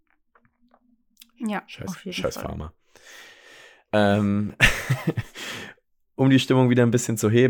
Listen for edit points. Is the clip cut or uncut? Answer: uncut